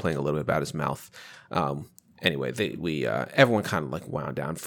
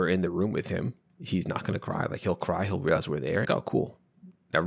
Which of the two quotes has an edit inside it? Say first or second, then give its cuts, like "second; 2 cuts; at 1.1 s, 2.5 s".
second; 1 cut; at 3.4 s